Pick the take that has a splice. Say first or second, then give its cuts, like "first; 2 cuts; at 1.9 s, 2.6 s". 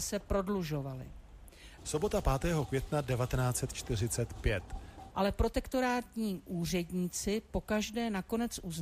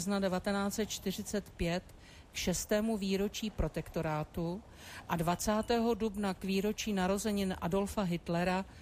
first; 2 cuts; at 1.8 s, 5.1 s